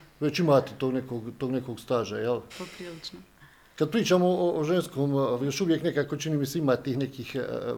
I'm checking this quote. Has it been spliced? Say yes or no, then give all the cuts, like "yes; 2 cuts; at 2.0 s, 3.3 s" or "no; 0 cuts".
yes; 2 cuts; at 2.5 s, 5.4 s